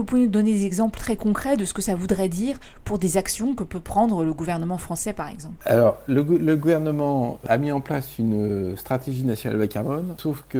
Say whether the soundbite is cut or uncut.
uncut